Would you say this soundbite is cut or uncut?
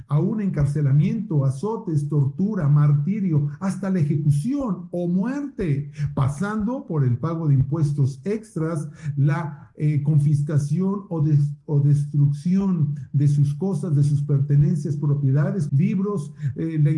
cut